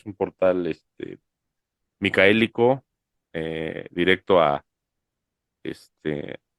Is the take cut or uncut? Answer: uncut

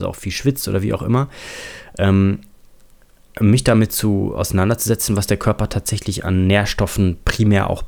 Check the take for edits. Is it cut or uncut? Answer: uncut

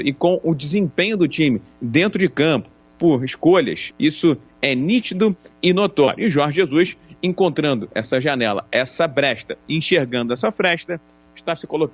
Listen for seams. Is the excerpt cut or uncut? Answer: cut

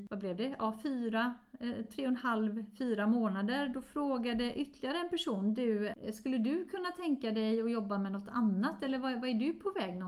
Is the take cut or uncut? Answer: uncut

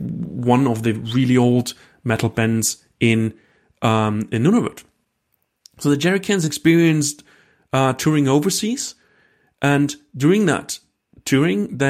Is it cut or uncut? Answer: uncut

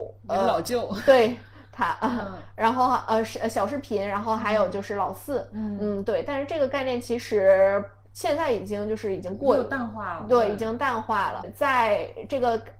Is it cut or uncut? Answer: uncut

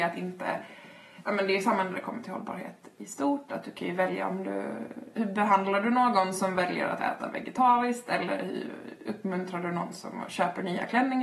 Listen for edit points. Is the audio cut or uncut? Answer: cut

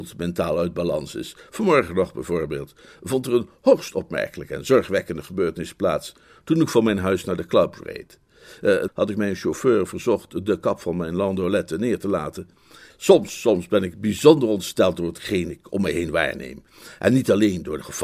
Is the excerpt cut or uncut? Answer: cut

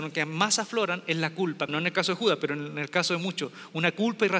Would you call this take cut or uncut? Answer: cut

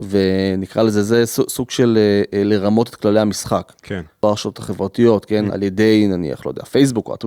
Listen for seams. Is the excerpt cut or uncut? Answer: cut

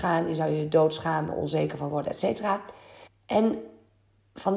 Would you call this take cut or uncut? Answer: cut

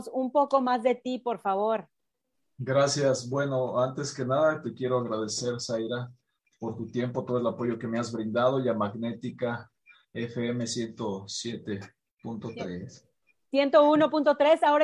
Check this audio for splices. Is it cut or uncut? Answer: uncut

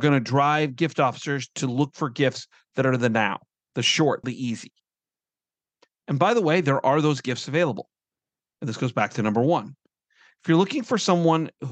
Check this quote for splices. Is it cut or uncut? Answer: cut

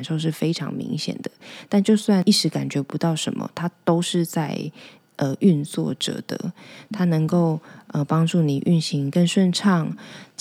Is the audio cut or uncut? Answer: uncut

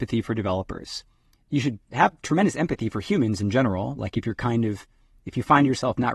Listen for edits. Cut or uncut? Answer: uncut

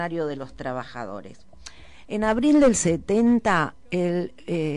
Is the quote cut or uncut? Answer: uncut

